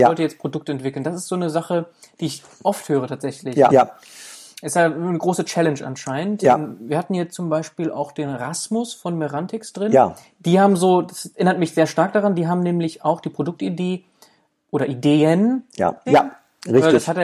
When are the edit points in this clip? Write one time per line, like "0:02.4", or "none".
0:03.7
0:16.1